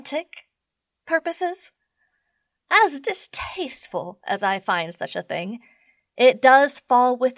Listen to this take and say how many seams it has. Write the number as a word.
zero